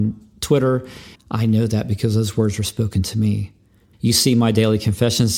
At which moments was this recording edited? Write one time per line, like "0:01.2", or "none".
0:01.1
0:03.9